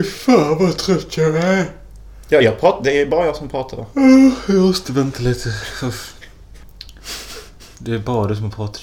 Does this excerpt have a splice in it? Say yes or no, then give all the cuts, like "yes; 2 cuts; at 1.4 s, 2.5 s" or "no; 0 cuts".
no; 0 cuts